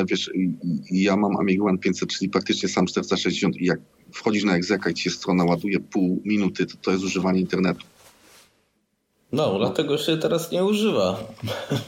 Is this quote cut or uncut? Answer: uncut